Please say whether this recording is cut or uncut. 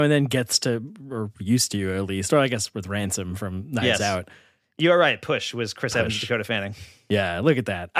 uncut